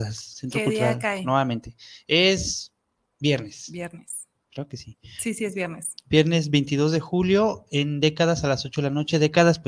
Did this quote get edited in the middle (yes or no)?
no